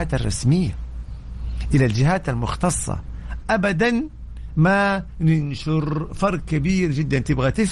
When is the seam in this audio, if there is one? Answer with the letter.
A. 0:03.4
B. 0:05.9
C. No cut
A